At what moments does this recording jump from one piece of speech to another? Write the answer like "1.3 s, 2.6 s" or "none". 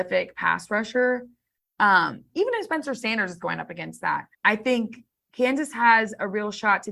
2.3 s, 4.3 s